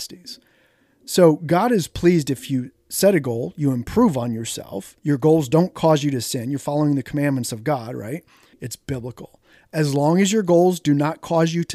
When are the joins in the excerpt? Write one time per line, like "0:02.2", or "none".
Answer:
0:05.0
0:08.5